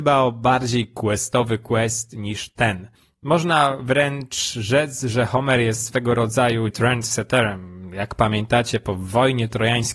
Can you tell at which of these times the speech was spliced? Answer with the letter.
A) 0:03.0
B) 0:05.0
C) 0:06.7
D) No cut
C